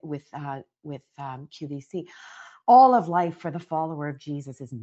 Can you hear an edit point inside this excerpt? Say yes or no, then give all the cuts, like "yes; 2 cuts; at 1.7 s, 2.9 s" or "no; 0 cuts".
no; 0 cuts